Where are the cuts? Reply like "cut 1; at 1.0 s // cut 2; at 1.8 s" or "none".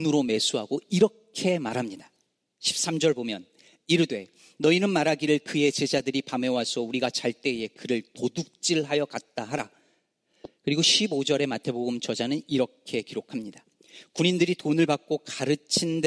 none